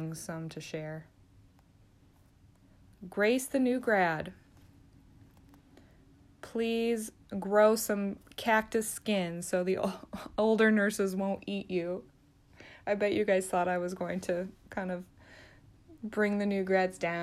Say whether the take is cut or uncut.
uncut